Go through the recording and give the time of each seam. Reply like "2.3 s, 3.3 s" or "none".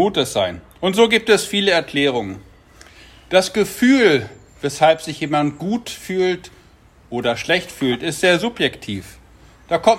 none

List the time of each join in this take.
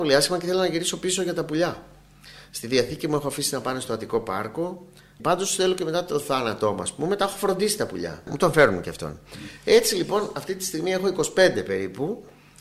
8.3 s

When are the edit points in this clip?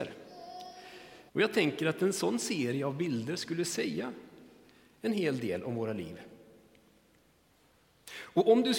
1.3 s

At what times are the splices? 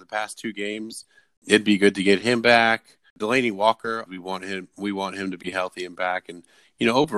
4.1 s

